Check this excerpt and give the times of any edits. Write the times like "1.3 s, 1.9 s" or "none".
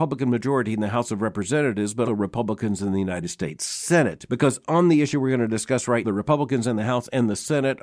2.1 s, 6.0 s